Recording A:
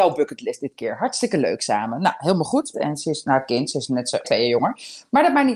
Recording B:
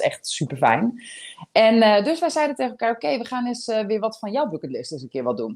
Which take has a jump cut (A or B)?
A